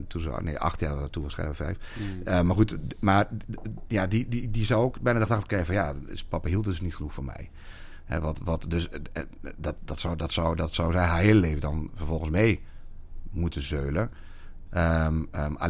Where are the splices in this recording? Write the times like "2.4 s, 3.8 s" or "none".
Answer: 14.7 s